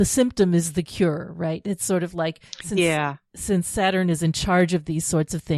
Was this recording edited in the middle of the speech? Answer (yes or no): no